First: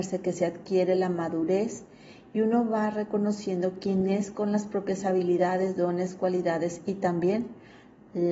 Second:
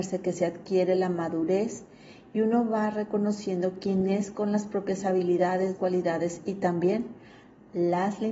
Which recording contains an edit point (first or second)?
second